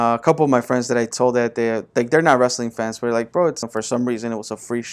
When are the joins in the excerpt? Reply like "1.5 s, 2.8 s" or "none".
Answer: 3.6 s